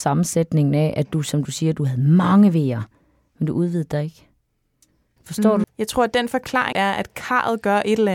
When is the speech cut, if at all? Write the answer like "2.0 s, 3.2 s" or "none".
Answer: 5.6 s, 6.7 s